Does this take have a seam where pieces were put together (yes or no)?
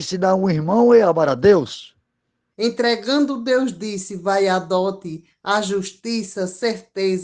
yes